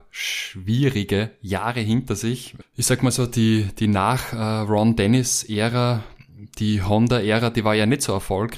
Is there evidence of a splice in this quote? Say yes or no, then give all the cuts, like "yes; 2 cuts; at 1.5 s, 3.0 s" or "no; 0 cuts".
no; 0 cuts